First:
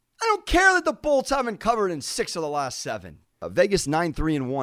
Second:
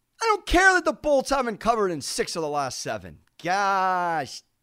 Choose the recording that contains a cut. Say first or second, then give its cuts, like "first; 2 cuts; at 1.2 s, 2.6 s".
first; 1 cut; at 3.3 s